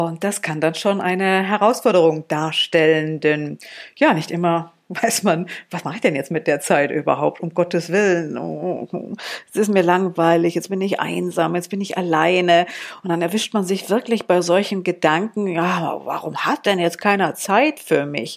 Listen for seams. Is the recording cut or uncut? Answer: uncut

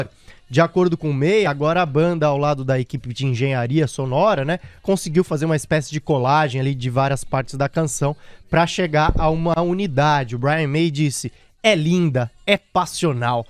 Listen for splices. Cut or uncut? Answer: uncut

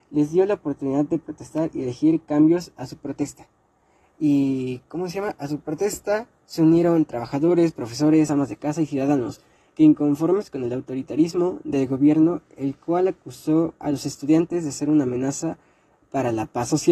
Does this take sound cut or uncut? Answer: uncut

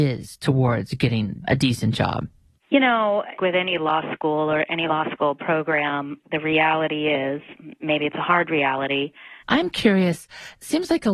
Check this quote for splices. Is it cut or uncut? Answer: cut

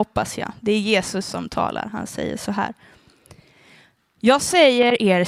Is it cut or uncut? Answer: uncut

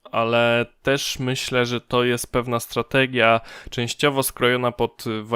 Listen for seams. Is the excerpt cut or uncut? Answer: uncut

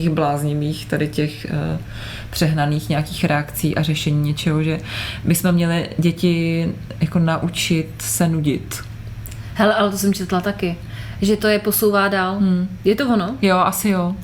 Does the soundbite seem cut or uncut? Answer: uncut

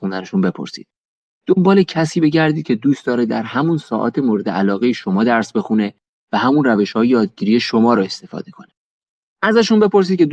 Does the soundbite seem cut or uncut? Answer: uncut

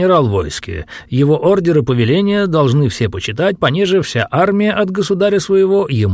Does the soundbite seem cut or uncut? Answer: uncut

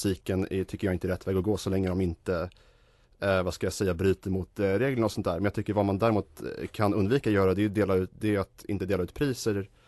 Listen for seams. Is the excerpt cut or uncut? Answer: uncut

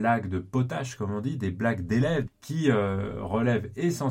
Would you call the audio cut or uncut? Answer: cut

